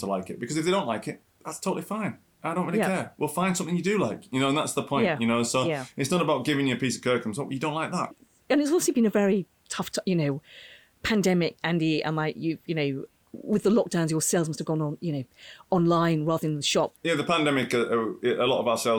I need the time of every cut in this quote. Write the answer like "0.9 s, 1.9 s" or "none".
8.1 s